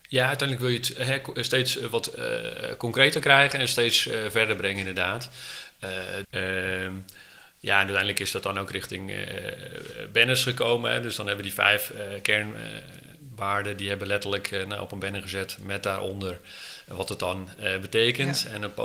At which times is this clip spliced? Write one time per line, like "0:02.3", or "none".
0:06.2